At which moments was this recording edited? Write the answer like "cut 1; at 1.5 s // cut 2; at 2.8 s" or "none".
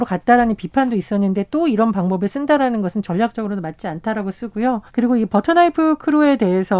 cut 1; at 4.9 s